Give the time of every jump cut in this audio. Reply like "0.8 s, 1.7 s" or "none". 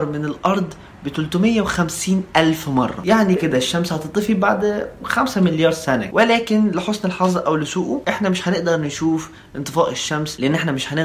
3.4 s